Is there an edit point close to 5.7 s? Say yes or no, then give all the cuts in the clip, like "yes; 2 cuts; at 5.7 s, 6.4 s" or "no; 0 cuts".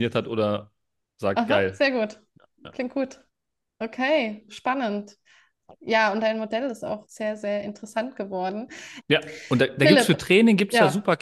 no; 3 cuts; at 4.5 s, 7.1 s, 9.0 s